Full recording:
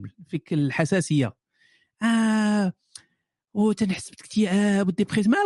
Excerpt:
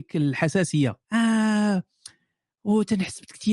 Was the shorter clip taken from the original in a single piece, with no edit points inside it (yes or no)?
no